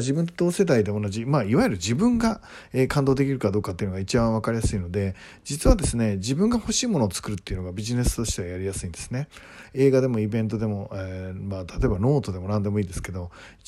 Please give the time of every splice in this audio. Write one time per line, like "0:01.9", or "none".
none